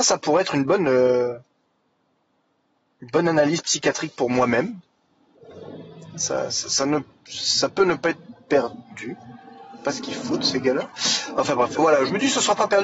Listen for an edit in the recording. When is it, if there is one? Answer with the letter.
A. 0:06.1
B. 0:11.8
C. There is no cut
B